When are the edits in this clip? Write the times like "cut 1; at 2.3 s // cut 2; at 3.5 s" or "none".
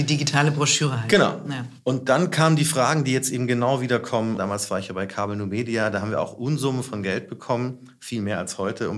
cut 1; at 4.4 s